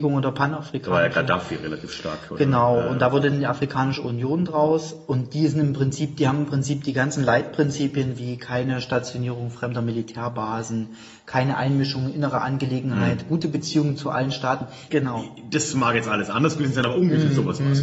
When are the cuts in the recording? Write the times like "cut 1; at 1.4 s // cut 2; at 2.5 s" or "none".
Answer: cut 1; at 14.9 s